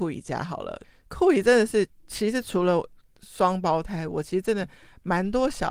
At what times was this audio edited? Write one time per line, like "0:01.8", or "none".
none